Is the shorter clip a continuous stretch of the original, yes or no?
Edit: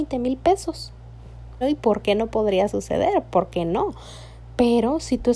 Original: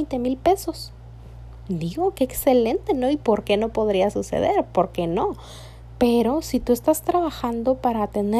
no